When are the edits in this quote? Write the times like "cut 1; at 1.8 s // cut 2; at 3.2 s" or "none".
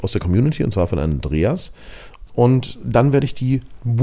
cut 1; at 2.3 s